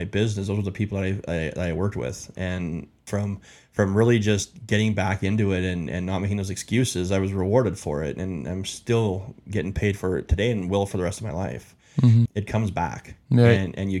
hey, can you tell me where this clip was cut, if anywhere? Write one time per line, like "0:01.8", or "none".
0:12.2